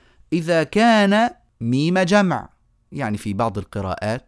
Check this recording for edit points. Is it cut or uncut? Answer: cut